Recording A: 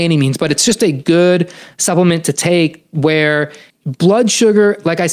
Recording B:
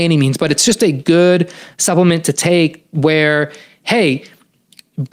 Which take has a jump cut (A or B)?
A